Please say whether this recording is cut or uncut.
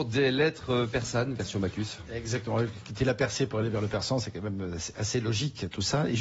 uncut